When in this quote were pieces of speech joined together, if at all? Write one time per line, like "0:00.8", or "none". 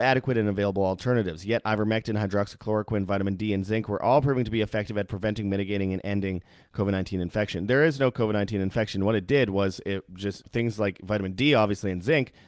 0:10.4